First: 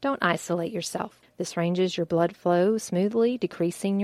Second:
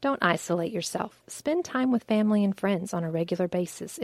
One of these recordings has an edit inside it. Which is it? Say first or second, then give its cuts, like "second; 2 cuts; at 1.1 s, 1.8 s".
first; 1 cut; at 1.2 s